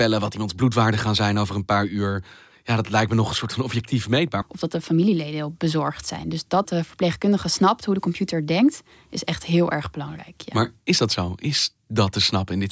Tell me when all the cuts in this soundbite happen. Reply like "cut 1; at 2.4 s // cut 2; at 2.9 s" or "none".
cut 1; at 4.4 s